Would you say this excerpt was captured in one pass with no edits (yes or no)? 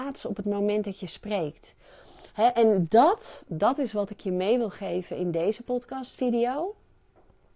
yes